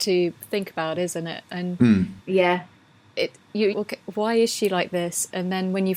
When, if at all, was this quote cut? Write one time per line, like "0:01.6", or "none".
0:02.2
0:03.7